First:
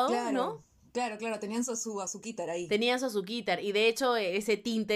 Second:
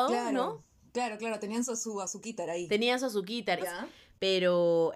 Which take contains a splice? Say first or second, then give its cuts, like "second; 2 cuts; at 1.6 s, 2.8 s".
second; 1 cut; at 3.6 s